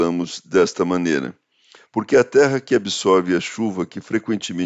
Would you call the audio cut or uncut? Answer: cut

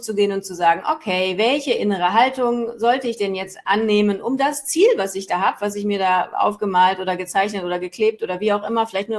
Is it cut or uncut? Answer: uncut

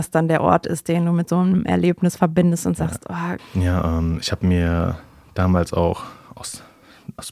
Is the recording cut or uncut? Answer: cut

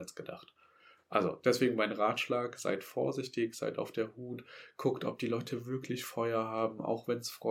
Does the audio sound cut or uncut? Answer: uncut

